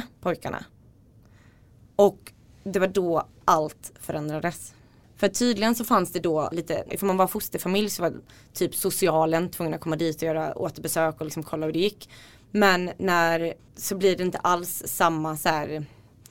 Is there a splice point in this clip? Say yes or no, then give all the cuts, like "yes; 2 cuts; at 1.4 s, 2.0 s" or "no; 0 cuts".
yes; 2 cuts; at 6.9 s, 13.6 s